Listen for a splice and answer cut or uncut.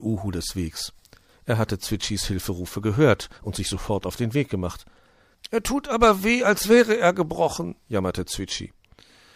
cut